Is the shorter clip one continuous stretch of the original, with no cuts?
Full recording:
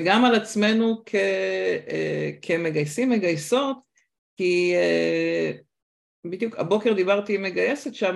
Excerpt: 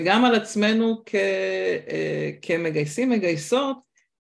yes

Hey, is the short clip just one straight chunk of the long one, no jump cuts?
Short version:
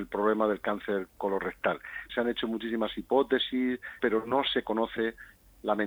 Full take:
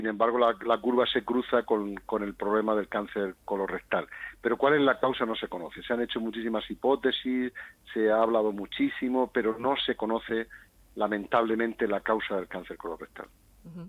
no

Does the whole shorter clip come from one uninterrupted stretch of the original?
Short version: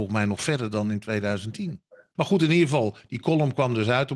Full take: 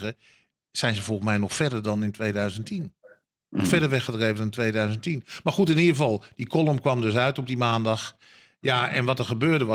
no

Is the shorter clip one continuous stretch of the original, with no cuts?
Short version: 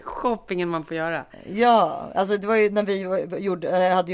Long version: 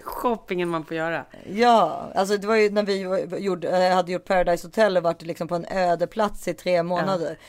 yes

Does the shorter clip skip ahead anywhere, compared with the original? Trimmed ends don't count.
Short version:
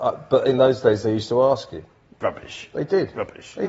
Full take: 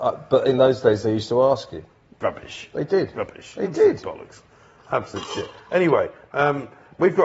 no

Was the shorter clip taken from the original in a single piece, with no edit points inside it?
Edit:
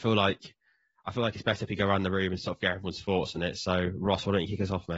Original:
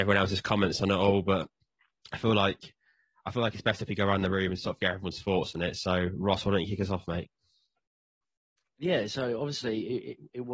yes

